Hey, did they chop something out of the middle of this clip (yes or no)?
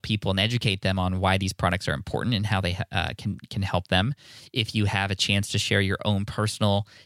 no